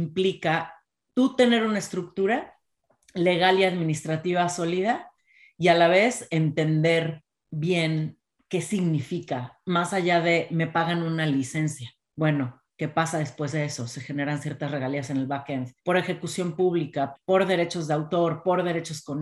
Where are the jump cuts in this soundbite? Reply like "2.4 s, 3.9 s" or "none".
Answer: 15.8 s, 17.2 s